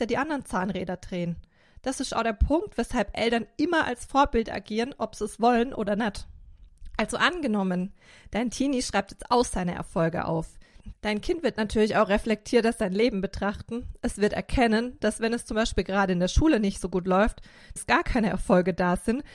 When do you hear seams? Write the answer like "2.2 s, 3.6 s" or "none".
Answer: 10.9 s, 17.8 s